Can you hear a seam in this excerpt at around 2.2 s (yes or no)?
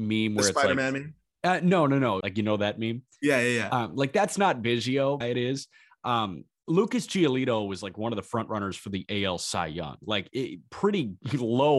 yes